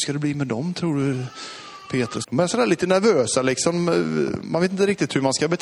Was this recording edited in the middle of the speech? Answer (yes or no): yes